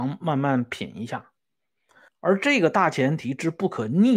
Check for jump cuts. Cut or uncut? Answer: cut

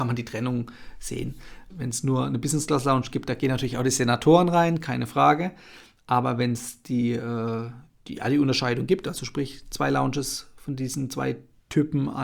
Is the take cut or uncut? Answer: cut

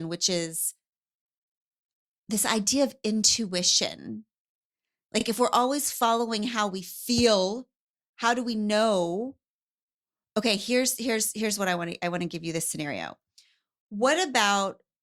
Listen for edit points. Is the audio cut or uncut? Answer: uncut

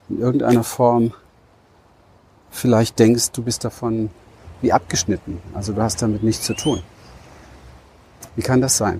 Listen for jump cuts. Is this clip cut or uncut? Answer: uncut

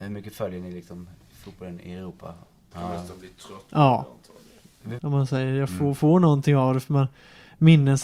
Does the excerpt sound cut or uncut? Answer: cut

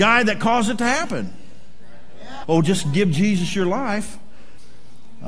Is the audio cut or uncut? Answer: cut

